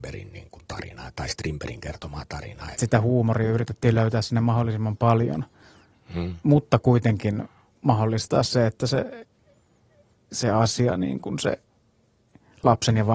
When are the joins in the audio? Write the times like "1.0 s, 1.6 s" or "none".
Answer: 2.7 s